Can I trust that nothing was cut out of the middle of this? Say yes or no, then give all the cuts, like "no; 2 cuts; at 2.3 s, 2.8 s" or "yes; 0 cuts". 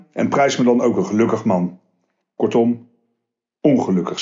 no; 1 cut; at 2.2 s